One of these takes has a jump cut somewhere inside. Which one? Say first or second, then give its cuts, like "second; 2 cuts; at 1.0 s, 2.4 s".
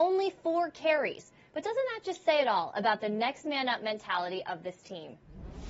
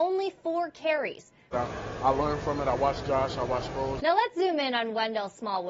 second; 2 cuts; at 1.5 s, 4.0 s